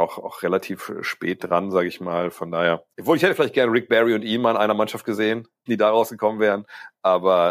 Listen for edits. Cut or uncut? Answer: cut